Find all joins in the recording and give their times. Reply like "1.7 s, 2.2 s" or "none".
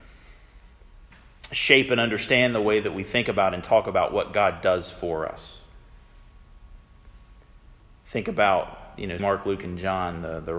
9.2 s